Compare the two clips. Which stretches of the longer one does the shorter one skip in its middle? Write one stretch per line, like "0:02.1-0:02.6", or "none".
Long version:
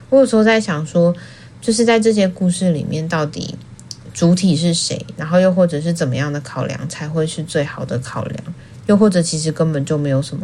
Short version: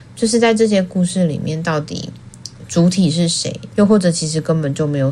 0:05.2-0:08.8